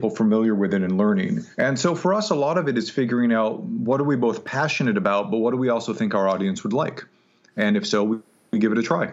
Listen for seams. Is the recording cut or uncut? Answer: cut